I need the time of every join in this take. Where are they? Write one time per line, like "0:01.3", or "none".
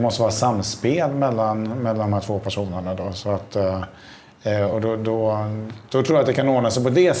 none